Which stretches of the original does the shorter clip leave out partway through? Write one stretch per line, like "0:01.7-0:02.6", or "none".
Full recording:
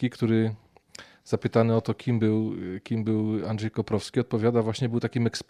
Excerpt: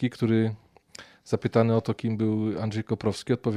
0:02.0-0:02.8